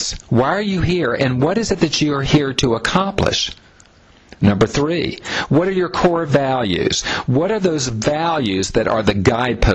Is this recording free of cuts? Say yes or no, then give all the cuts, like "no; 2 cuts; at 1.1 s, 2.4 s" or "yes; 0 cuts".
yes; 0 cuts